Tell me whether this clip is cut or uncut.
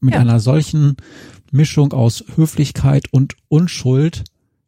uncut